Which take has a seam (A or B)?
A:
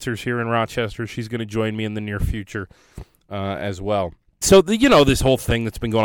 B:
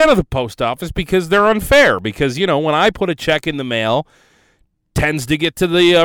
A